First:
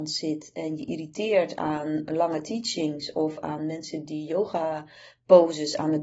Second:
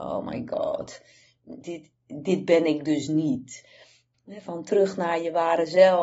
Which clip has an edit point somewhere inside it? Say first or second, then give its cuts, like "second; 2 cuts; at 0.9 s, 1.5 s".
second; 2 cuts; at 1.6 s, 4.1 s